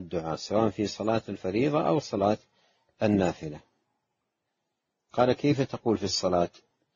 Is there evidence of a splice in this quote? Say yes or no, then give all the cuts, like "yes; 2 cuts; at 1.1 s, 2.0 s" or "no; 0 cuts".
no; 0 cuts